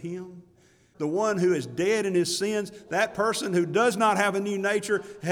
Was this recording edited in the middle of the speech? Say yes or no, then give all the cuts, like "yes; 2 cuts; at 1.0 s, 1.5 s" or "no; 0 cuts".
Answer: yes; 1 cut; at 0.9 s